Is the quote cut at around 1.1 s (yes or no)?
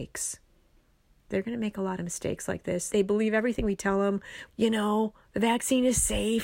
no